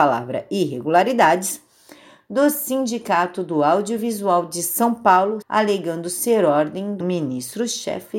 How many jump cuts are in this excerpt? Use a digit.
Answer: 2